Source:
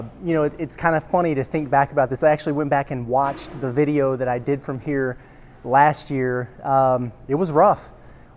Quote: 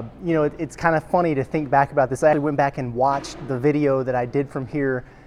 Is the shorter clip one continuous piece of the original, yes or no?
no